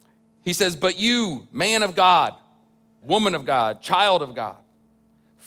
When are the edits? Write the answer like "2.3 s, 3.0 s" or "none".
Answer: 3.0 s